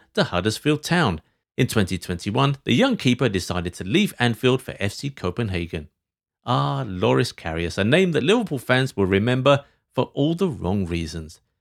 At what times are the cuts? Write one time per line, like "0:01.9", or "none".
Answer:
0:01.4
0:06.3